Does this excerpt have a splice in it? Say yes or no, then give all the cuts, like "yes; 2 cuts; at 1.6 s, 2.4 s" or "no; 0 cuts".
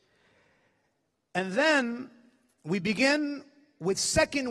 no; 0 cuts